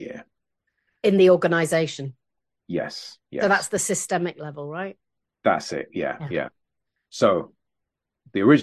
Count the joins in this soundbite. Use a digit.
0